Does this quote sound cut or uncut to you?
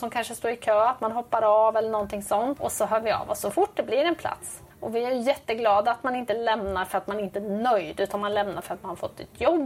cut